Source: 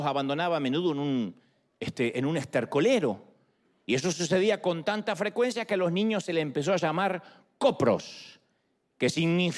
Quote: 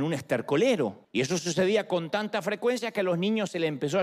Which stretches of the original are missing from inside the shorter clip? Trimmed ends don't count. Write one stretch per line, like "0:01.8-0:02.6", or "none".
0:03.3-0:03.8